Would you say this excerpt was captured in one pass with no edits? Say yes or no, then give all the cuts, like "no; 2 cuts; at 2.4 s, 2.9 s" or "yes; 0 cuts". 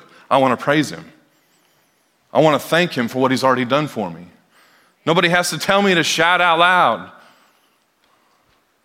yes; 0 cuts